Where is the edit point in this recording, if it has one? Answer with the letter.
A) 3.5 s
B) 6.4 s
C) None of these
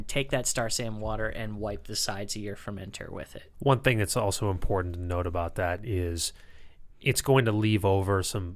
A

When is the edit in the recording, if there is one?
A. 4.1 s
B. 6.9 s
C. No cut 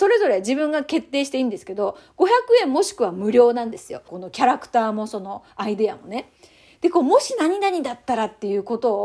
A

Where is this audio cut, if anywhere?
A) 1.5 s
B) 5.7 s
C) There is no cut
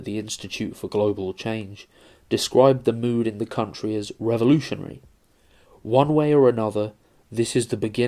B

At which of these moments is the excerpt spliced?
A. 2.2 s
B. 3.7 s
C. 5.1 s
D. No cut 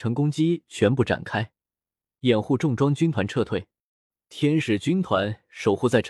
D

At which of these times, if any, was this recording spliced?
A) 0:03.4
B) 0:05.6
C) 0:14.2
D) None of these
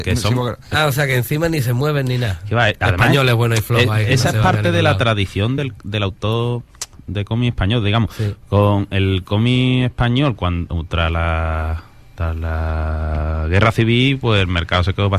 D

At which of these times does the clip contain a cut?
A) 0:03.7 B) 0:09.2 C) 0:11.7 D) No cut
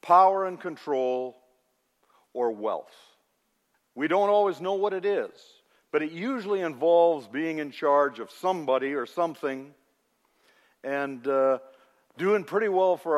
A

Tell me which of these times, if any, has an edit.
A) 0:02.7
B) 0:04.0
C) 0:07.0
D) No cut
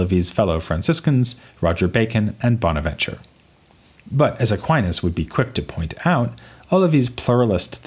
B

